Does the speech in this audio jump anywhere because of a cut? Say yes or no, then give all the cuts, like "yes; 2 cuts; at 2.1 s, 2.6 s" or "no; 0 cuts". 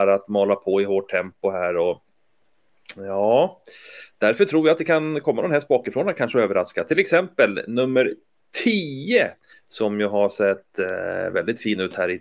yes; 1 cut; at 9.5 s